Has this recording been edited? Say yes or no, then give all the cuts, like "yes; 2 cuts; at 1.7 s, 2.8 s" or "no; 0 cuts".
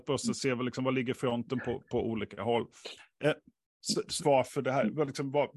yes; 1 cut; at 4.2 s